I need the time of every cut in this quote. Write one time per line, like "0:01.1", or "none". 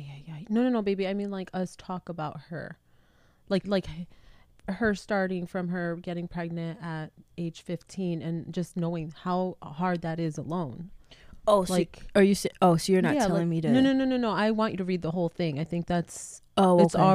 0:03.6